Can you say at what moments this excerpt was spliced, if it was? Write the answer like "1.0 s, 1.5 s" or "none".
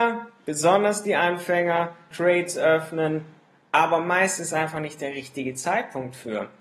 2.1 s

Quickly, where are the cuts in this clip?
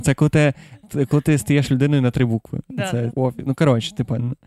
3.1 s

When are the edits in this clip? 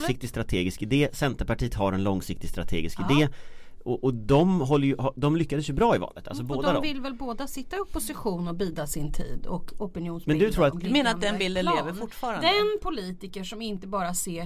10.7 s

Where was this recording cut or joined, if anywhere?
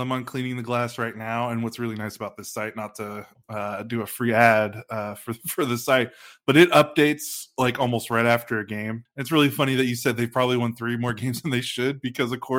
9.1 s

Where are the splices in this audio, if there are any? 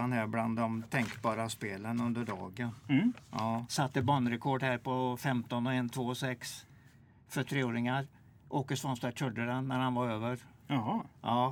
3.7 s

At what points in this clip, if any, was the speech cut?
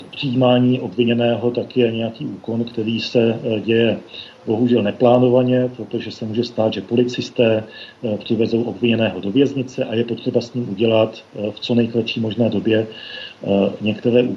none

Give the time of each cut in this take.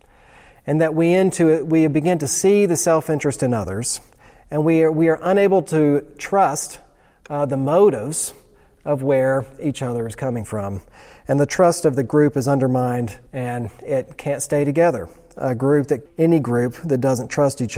13.3 s, 16.1 s

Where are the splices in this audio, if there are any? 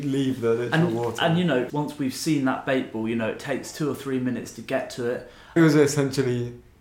1.7 s, 5.6 s

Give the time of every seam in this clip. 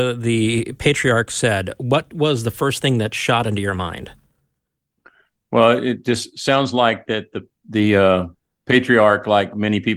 none

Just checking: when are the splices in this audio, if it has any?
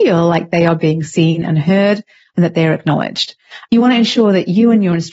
3.7 s

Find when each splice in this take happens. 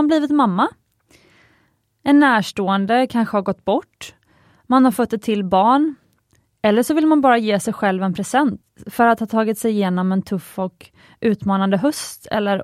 none

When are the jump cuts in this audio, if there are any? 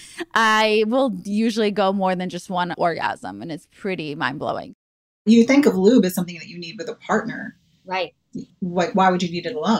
2.7 s

